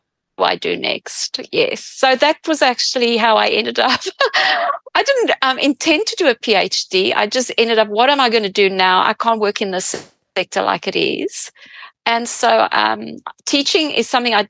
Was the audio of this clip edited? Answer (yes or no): no